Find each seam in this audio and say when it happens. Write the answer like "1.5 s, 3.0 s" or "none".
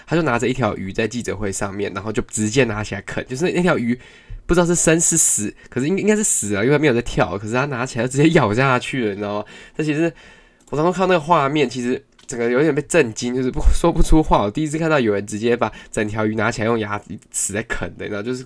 none